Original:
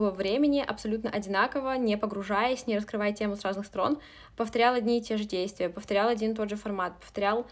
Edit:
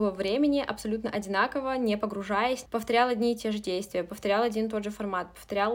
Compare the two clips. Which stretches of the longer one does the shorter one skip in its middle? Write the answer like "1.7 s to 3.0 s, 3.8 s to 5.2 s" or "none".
2.7 s to 4.3 s